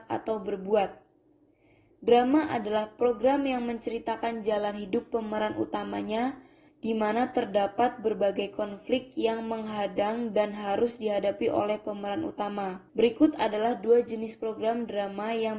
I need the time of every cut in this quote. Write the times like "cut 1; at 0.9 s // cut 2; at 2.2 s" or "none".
cut 1; at 6.7 s // cut 2; at 12.9 s